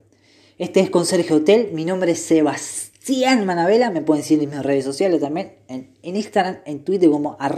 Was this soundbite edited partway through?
no; 0 cuts

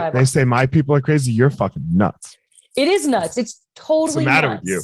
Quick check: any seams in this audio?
no; 0 cuts

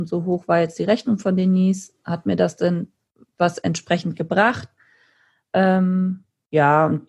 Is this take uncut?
yes; 0 cuts

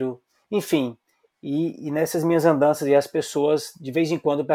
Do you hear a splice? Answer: no; 0 cuts

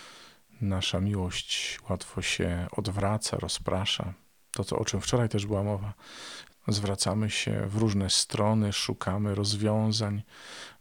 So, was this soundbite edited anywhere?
no; 0 cuts

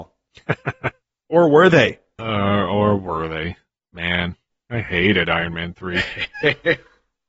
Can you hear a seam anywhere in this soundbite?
yes; 1 cut; at 2.2 s

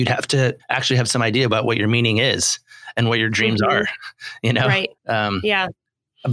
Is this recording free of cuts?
no; 1 cut; at 5.0 s

